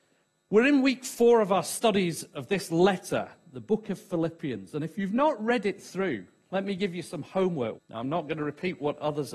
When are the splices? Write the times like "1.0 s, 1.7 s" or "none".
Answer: 7.7 s